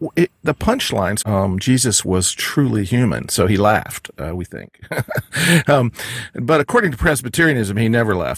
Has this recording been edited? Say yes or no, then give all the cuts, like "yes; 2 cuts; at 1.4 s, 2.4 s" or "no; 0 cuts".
yes; 1 cut; at 1.2 s